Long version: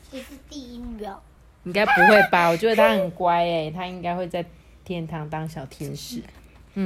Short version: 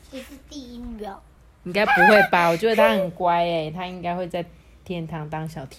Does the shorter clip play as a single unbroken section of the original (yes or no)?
yes